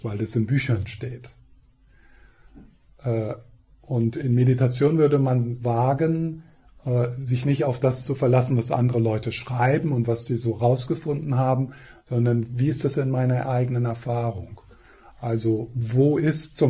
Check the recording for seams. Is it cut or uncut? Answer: uncut